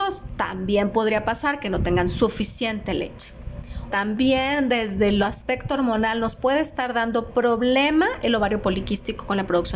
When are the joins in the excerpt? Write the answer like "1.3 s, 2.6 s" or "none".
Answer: 3.9 s